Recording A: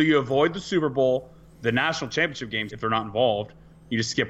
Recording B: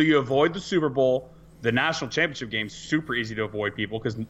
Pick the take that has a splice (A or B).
A